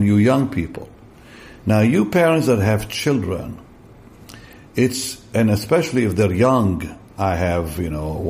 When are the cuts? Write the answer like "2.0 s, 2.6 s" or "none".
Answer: 7.1 s